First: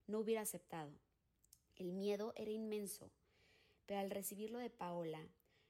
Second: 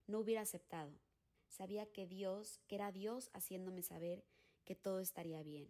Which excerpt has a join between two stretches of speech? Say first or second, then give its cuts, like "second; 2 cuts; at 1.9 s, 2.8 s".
second; 1 cut; at 1.3 s